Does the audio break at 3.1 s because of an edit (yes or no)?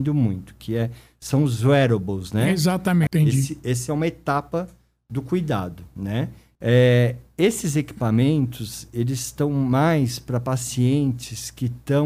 yes